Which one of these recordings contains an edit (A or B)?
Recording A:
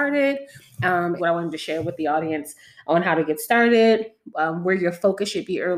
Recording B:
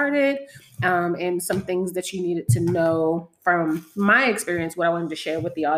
A